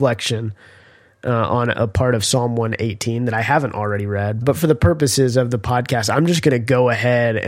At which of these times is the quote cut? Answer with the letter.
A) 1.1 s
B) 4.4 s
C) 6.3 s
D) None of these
B